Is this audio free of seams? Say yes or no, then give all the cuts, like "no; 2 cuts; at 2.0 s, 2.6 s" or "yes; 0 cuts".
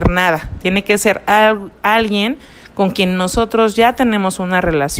yes; 0 cuts